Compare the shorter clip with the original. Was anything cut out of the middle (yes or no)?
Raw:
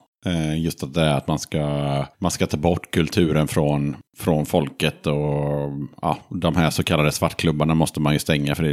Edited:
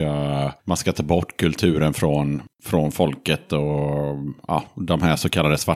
no